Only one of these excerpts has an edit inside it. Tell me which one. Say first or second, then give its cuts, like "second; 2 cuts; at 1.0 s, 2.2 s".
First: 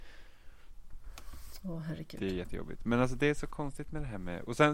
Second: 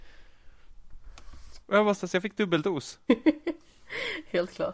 second; 2 cuts; at 1.6 s, 3.1 s